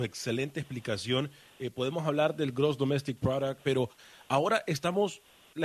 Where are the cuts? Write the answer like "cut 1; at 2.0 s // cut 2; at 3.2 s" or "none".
cut 1; at 3.6 s